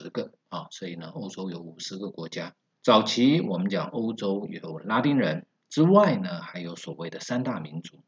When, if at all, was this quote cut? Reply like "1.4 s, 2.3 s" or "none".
2.7 s